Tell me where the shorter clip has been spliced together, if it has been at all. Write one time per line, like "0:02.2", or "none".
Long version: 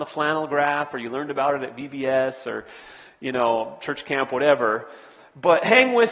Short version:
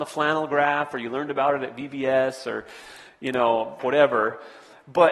0:03.8